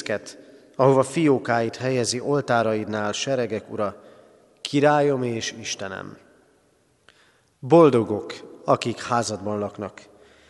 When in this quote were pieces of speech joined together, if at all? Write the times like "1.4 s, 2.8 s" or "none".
none